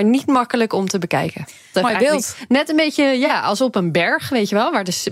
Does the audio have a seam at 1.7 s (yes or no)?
yes